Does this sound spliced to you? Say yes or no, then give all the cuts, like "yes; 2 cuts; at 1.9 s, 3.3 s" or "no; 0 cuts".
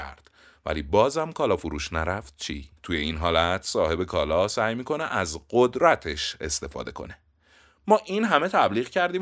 yes; 1 cut; at 2.8 s